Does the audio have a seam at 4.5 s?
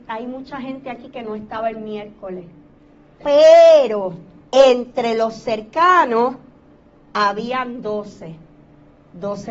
yes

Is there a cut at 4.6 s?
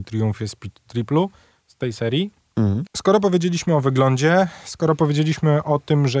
no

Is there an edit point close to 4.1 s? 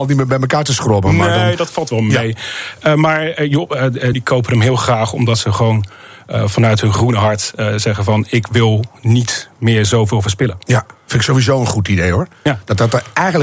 yes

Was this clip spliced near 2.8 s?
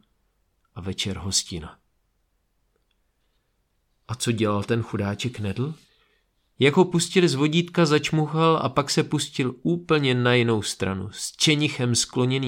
no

